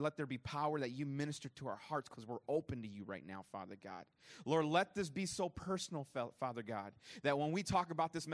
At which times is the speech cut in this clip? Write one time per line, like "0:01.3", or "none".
none